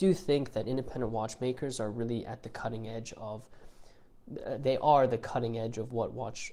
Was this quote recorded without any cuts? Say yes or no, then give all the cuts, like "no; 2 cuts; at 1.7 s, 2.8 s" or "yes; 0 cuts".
yes; 0 cuts